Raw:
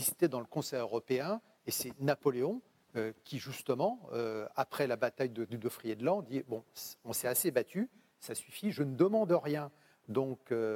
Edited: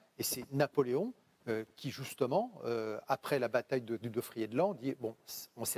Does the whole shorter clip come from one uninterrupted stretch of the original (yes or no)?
yes